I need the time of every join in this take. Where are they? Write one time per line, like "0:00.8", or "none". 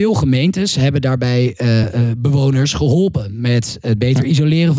0:01.8